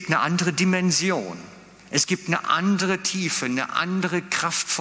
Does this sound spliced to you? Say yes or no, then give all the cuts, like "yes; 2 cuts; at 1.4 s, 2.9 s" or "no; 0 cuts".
no; 0 cuts